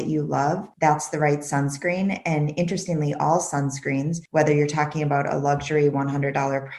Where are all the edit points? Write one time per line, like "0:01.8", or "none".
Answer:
none